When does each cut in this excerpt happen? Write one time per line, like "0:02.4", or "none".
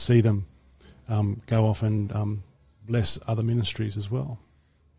none